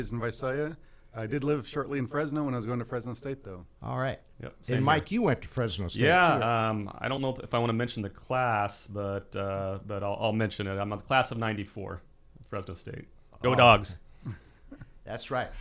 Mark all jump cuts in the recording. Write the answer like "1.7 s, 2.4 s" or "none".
3.7 s

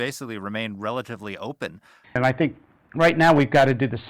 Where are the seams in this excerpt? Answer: 2.0 s

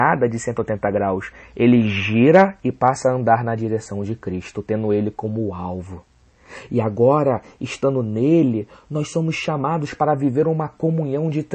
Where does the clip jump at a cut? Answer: none

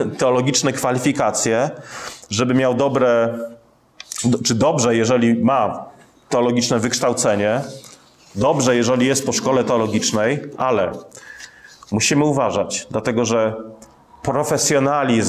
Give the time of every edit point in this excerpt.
none

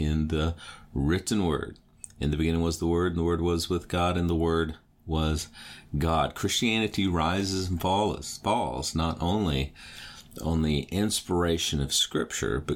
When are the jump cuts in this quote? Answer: none

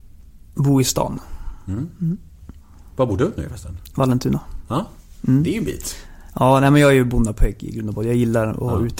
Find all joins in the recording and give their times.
none

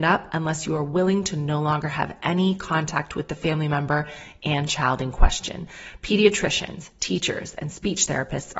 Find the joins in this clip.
none

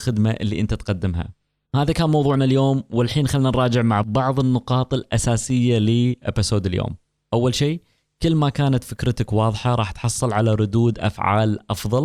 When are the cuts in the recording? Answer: 4.0 s

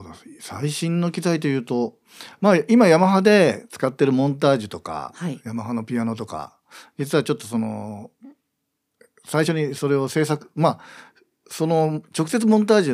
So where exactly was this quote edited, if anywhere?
none

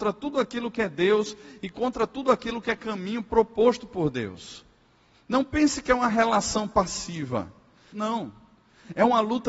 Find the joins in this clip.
5.1 s, 7.9 s

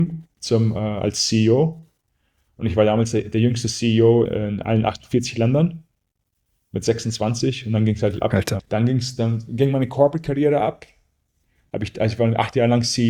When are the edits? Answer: 4.3 s, 8.6 s

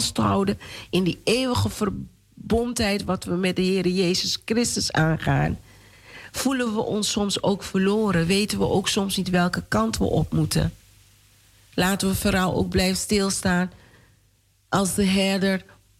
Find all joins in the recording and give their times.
none

